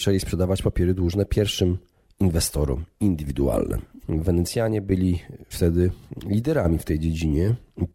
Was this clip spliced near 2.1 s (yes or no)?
no